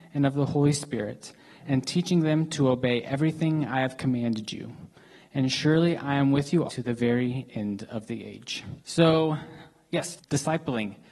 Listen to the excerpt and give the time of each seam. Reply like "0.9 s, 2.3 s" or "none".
6.7 s, 8.8 s, 10.2 s